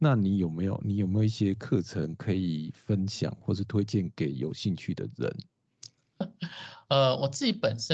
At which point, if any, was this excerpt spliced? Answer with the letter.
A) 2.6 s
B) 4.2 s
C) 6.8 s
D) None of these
D